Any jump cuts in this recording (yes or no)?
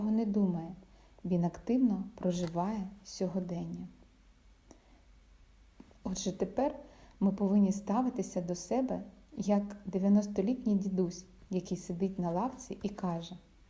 no